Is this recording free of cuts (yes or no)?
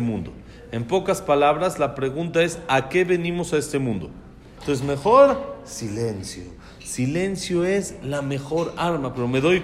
no